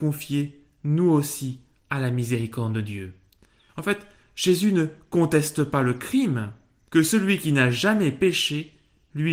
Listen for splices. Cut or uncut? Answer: cut